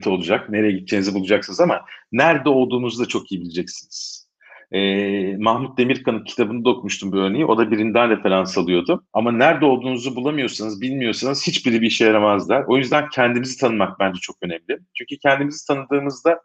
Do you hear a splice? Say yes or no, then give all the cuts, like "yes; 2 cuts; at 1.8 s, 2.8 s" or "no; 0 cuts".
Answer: yes; 1 cut; at 9.1 s